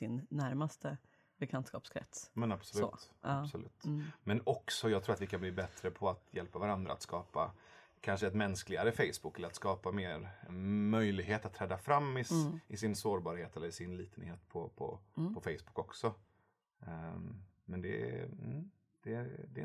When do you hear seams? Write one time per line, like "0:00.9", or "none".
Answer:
0:10.5